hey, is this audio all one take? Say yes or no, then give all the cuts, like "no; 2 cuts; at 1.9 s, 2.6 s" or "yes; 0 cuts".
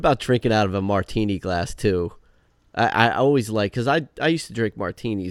yes; 0 cuts